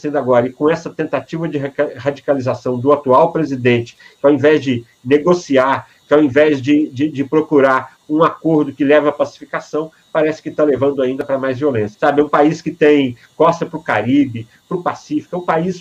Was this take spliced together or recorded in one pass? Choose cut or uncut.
cut